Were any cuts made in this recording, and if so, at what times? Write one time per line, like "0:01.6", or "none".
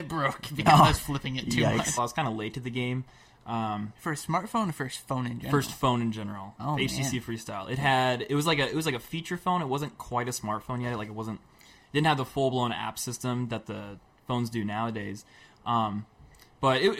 0:02.0